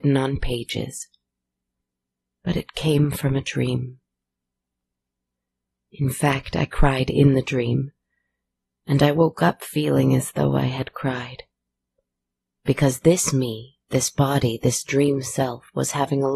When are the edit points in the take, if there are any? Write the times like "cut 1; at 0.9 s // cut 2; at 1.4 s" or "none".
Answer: cut 1; at 12.5 s // cut 2; at 13.8 s